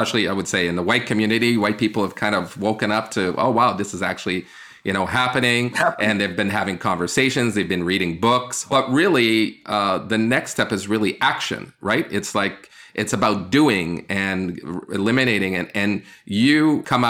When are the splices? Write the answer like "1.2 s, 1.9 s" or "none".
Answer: none